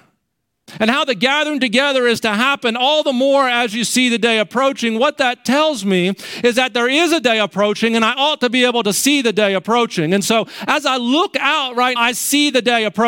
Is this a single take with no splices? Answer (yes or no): no